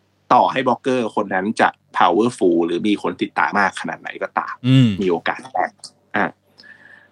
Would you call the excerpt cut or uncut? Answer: cut